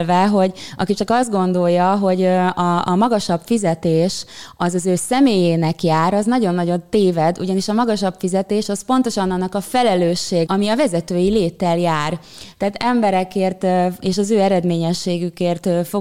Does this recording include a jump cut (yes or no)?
yes